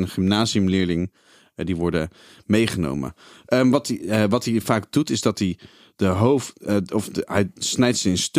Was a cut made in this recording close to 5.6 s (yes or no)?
no